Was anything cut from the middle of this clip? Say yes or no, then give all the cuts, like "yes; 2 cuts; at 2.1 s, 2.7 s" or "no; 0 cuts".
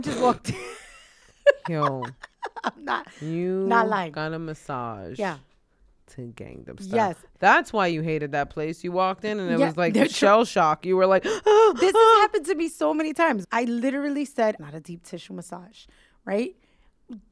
yes; 2 cuts; at 13.4 s, 14.6 s